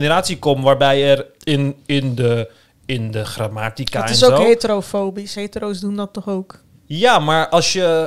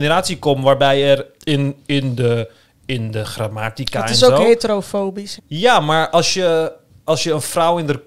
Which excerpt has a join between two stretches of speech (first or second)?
second